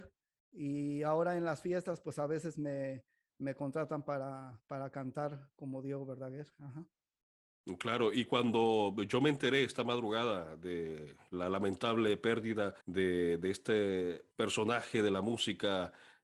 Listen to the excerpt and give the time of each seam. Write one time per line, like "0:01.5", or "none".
0:12.8
0:14.3